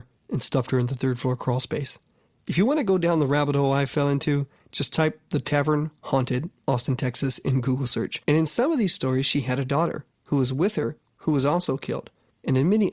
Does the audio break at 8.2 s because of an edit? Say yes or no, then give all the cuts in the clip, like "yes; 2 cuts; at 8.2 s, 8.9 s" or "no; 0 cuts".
yes; 1 cut; at 8.2 s